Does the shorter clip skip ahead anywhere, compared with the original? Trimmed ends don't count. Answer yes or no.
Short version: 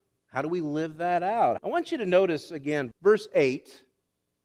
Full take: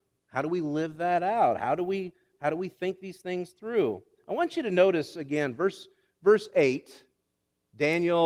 yes